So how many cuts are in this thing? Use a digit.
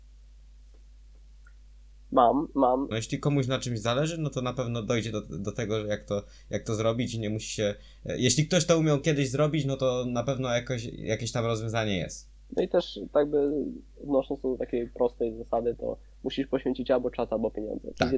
1